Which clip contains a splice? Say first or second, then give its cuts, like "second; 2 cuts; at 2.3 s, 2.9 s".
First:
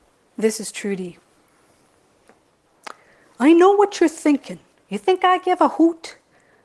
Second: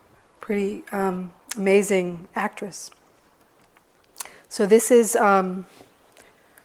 first; 1 cut; at 4.8 s